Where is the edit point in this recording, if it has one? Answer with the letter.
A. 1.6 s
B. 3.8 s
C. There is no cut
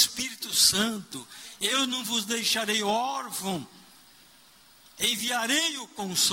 C